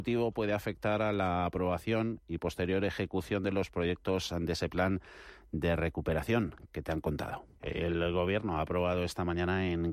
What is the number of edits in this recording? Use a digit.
1